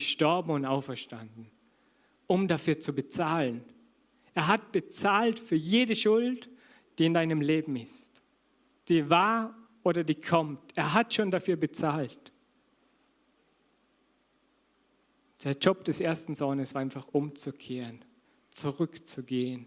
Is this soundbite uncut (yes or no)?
yes